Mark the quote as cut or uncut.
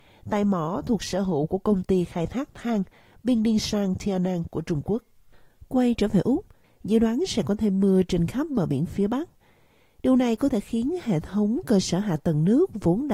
cut